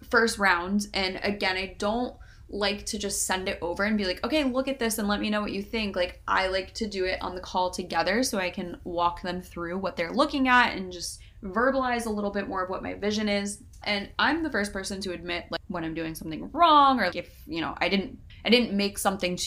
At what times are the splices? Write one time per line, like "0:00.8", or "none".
0:13.8
0:17.1